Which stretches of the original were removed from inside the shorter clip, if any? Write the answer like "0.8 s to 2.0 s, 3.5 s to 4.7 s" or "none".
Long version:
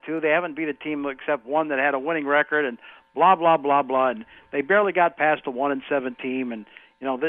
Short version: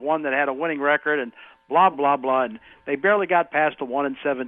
3.4 s to 3.6 s